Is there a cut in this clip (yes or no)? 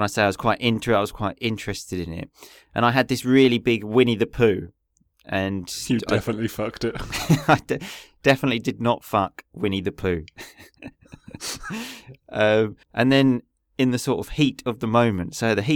yes